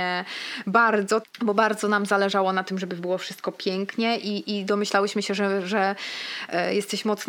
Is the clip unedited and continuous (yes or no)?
no